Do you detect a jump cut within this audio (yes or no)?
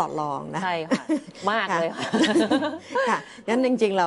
no